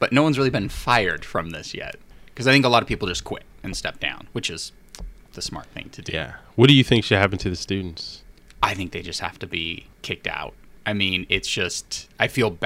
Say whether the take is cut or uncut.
uncut